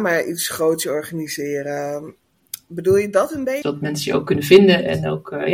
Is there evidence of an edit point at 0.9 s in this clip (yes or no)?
no